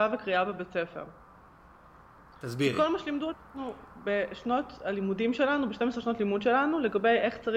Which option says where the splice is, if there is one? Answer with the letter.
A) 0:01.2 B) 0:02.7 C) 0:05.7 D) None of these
D